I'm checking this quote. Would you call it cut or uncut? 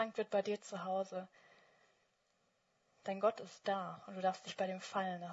uncut